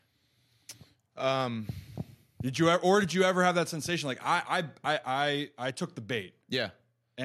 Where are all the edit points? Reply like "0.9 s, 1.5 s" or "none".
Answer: none